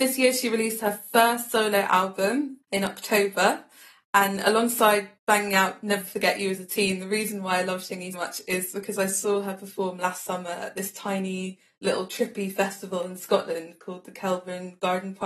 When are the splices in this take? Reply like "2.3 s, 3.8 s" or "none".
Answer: 2.6 s, 8.1 s